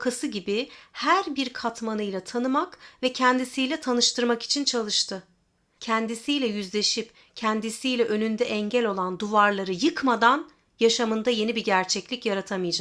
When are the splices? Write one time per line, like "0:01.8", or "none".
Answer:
0:05.8